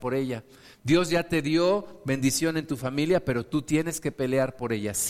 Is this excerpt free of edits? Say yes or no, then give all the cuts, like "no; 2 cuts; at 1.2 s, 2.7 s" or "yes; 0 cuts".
yes; 0 cuts